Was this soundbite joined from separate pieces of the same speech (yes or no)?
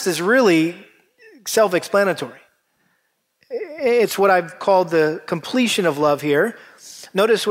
no